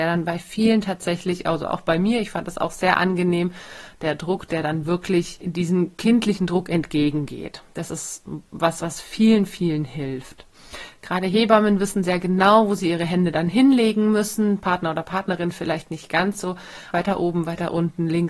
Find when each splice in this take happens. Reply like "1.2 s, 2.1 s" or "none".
16.9 s